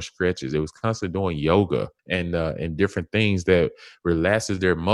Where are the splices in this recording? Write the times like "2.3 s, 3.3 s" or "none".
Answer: 2.0 s